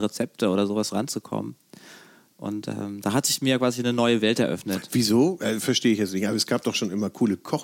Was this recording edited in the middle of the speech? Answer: no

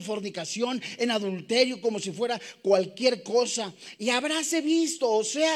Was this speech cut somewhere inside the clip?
yes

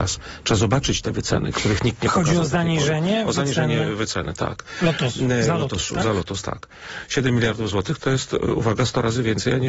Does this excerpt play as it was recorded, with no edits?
yes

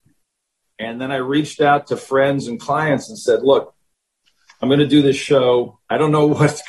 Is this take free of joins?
yes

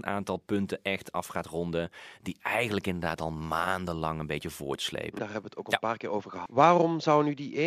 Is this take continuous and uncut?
no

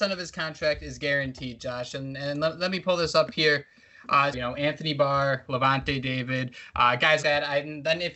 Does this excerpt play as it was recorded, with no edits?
no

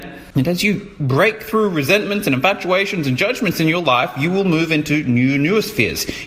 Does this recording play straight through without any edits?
yes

